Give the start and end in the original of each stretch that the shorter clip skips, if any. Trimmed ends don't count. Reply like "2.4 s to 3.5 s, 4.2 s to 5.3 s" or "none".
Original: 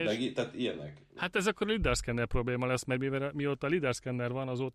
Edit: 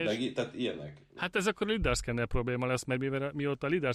none